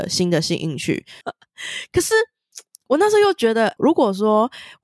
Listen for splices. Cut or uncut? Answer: cut